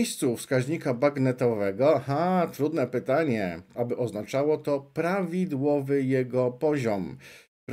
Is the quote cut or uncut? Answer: cut